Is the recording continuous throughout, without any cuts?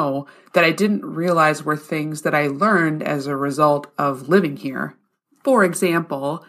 yes; 0 cuts

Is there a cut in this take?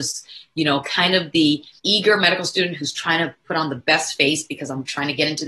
yes; 1 cut; at 1.8 s

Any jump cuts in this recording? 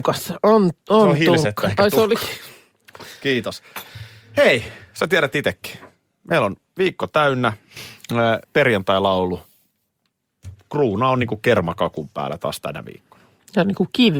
yes; 1 cut; at 8.4 s

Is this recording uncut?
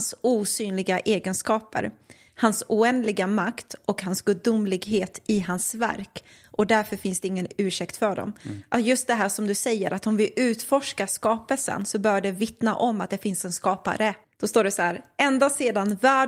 no; 1 cut; at 14.2 s

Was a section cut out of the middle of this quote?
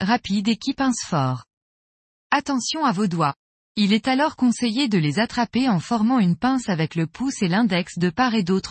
no; 0 cuts

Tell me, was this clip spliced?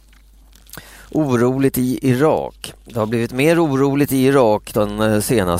no; 0 cuts

